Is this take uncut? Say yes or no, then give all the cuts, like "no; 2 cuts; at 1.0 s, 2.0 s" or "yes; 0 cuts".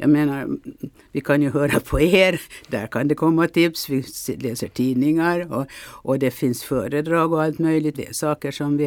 no; 1 cut; at 7.9 s